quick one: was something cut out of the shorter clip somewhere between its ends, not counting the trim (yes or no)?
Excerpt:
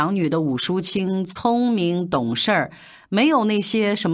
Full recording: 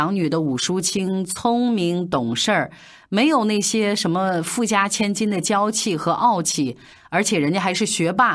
no